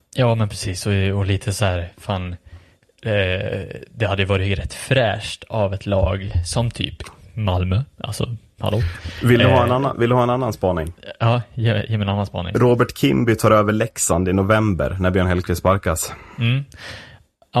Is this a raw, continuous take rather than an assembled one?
yes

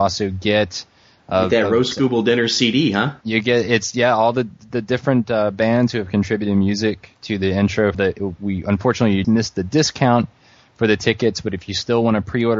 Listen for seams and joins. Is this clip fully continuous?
no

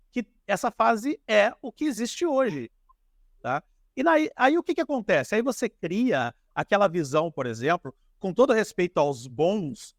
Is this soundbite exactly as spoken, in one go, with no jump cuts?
yes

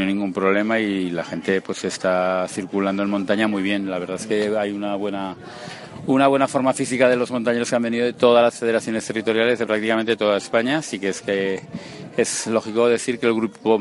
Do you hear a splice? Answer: no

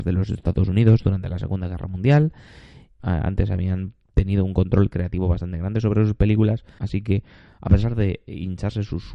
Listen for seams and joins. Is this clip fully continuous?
no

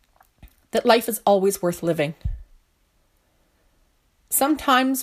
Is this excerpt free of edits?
yes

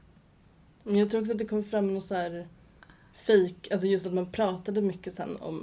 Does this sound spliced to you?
no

